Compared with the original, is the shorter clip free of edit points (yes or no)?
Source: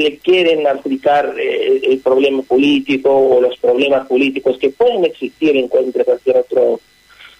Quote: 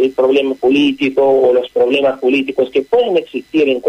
yes